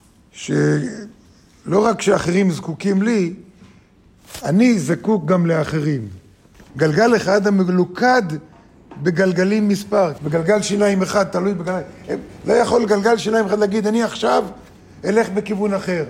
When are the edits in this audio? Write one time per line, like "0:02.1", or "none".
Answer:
0:06.7
0:10.2